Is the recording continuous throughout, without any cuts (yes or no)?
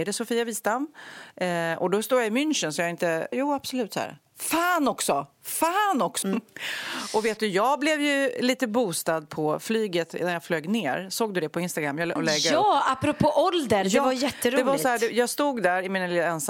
no